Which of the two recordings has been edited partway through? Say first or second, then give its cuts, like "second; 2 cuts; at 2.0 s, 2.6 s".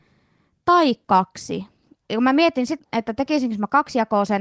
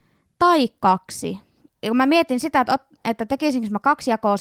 first; 1 cut; at 2.8 s